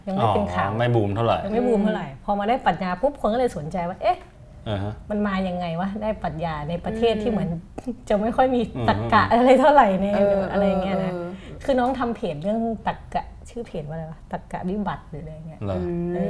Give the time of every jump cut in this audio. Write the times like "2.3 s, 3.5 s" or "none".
none